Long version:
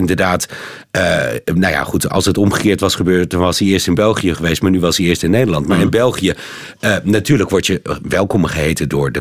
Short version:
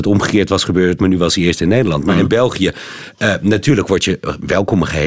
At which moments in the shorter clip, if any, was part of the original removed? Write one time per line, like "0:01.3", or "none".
0:01.0